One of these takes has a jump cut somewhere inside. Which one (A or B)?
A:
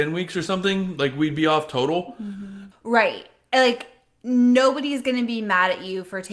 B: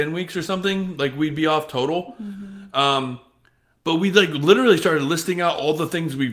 A